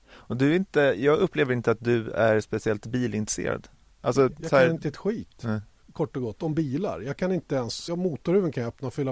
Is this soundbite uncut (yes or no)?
no